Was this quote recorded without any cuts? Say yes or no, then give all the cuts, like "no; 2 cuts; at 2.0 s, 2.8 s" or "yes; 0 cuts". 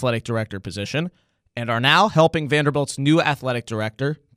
yes; 0 cuts